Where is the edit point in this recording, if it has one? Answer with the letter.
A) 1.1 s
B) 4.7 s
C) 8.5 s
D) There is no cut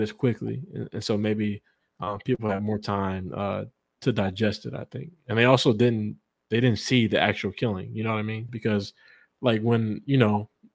C